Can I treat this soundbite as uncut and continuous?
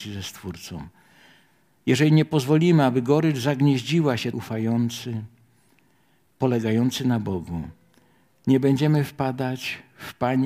no; 1 cut; at 4.3 s

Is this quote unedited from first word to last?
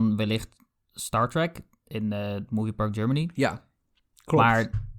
yes; 0 cuts

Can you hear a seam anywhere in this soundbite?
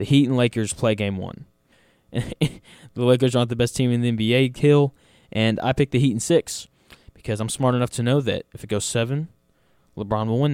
yes; 1 cut; at 1.7 s

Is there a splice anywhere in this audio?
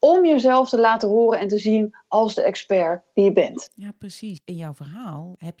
no; 0 cuts

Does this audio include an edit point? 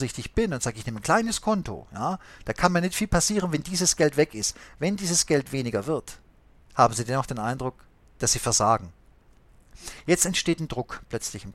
no; 0 cuts

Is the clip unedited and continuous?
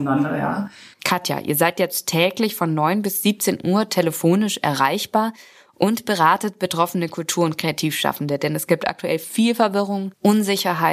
no; 1 cut; at 0.9 s

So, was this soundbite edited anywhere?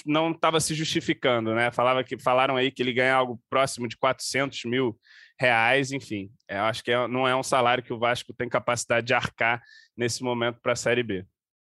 no; 0 cuts

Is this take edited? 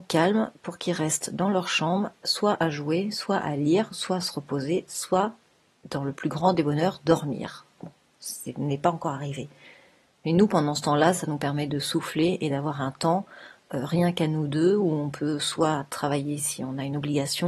no; 0 cuts

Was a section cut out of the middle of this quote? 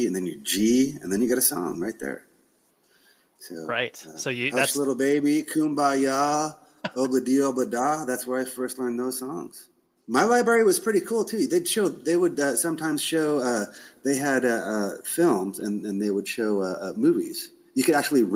no; 0 cuts

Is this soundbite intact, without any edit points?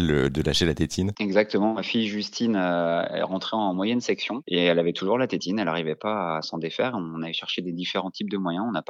yes; 0 cuts

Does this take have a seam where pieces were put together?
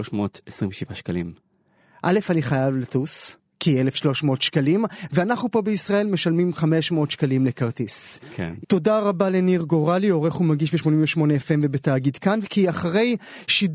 yes; 2 cuts; at 8.6 s, 12.4 s

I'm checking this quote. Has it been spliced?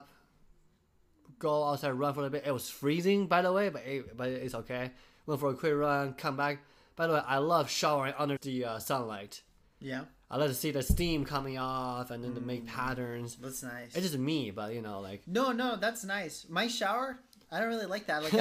yes; 1 cut; at 8.4 s

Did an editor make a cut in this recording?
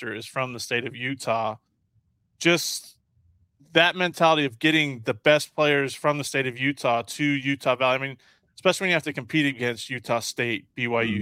no; 0 cuts

